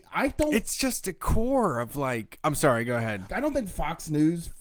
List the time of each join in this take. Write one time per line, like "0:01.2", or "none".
0:03.3